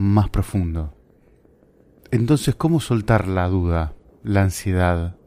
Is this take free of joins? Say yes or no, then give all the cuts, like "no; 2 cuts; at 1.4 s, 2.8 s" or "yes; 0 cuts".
yes; 0 cuts